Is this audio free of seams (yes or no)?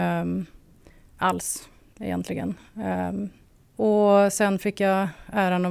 yes